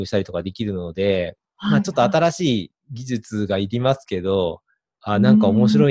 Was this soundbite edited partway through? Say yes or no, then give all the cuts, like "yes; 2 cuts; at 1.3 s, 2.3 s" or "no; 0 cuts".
no; 0 cuts